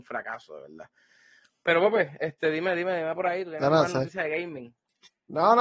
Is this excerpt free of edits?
yes; 0 cuts

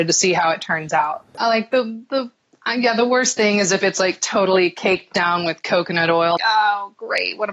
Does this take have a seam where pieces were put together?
yes; 2 cuts; at 1.4 s, 6.4 s

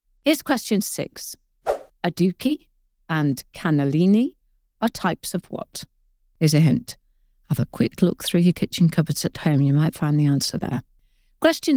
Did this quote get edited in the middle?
yes; 1 cut; at 2.9 s

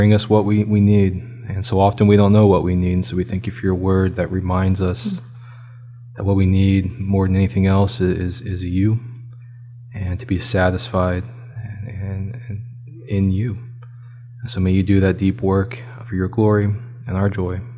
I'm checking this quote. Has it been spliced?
yes; 1 cut; at 16.0 s

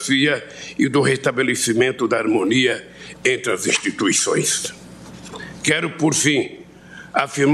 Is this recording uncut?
yes; 0 cuts

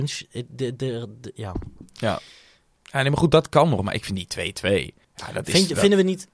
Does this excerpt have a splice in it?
yes; 1 cut; at 5.0 s

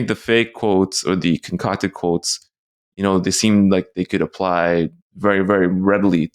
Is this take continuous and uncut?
yes; 0 cuts

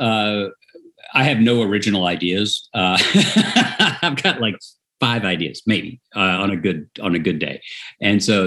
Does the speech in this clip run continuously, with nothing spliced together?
yes; 0 cuts

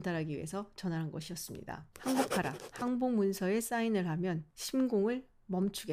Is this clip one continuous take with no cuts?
yes; 0 cuts

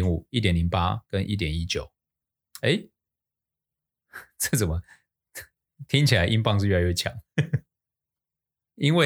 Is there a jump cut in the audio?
no; 0 cuts

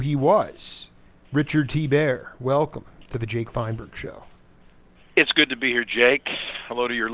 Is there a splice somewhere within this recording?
no; 0 cuts

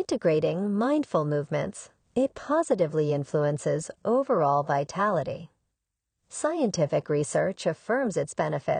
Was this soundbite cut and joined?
no; 0 cuts

